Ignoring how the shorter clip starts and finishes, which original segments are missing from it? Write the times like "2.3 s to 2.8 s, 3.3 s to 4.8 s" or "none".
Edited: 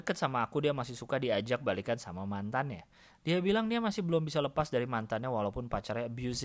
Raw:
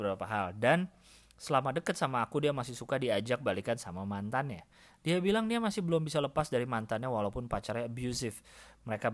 none